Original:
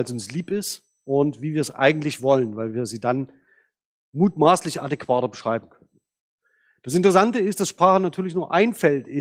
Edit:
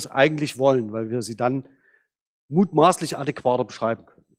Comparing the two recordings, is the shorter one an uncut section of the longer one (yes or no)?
yes